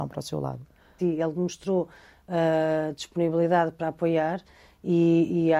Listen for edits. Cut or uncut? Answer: cut